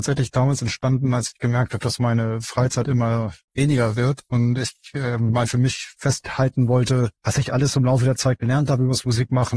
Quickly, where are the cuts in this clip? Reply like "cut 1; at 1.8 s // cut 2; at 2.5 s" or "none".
cut 1; at 7.2 s